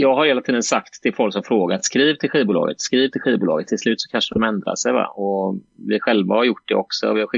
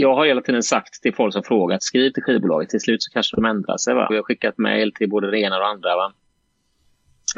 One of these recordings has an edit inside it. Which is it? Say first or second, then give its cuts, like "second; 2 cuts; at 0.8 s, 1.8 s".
second; 2 cuts; at 1.8 s, 4.1 s